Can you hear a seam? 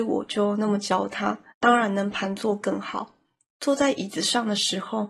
yes; 1 cut; at 1.5 s

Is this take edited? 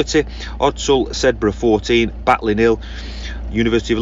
no; 0 cuts

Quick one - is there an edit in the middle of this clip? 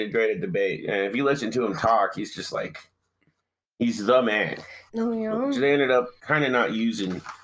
yes; 2 cuts; at 4.9 s, 6.2 s

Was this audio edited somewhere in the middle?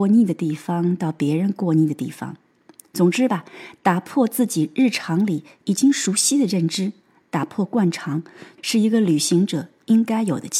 yes; 1 cut; at 8.6 s

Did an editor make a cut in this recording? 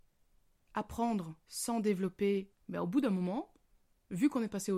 yes; 2 cuts; at 1.4 s, 2.5 s

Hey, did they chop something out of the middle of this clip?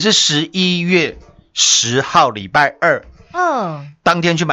no; 0 cuts

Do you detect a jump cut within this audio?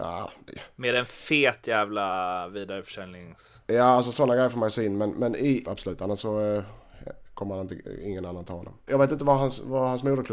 yes; 2 cuts; at 5.7 s, 8.9 s

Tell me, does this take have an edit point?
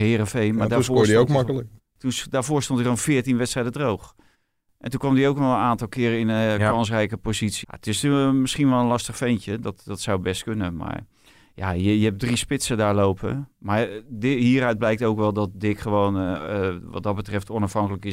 yes; 1 cut; at 7.6 s

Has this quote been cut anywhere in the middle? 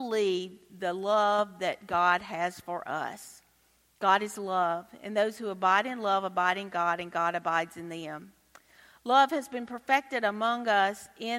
no; 0 cuts

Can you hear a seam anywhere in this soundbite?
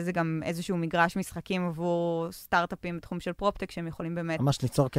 no; 0 cuts

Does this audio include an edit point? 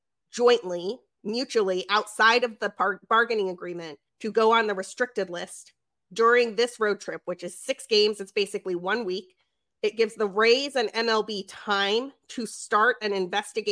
yes; 1 cut; at 4.1 s

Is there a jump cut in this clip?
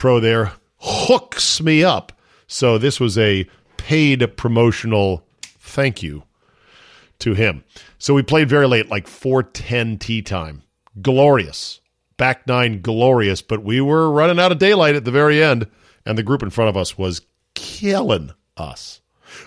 no; 0 cuts

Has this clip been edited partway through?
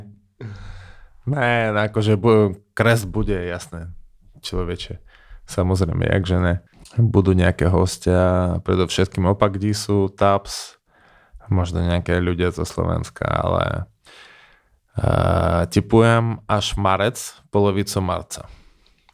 no; 0 cuts

